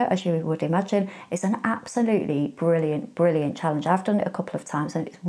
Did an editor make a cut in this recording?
no; 0 cuts

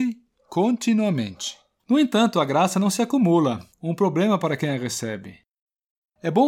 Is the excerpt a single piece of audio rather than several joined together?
no; 1 cut; at 3.7 s

